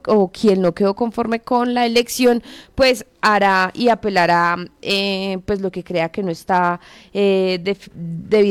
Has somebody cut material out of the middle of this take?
no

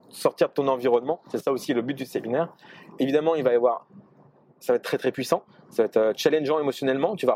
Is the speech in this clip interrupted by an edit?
no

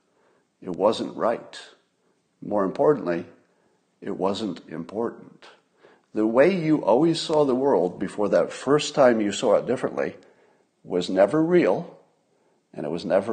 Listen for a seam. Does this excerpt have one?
no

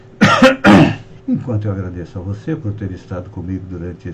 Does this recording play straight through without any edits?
no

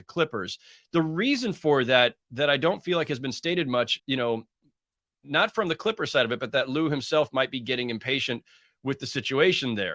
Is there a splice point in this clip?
yes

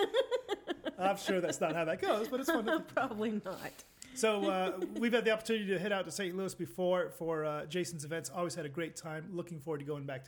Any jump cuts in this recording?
no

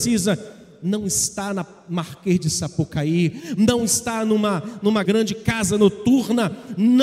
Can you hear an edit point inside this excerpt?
yes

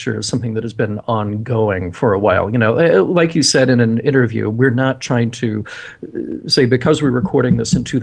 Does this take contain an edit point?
no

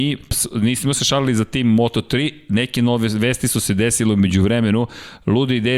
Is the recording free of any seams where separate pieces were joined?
yes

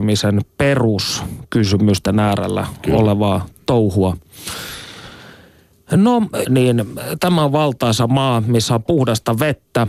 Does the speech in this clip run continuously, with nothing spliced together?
no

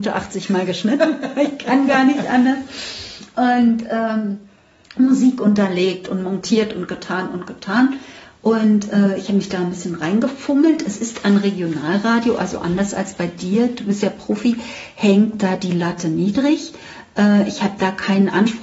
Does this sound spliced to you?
no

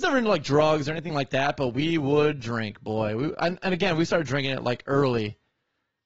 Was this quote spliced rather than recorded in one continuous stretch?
no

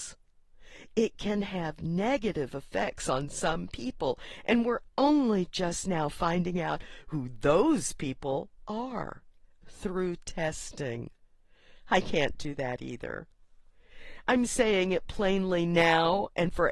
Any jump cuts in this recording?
no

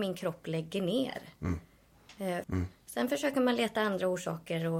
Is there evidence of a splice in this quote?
yes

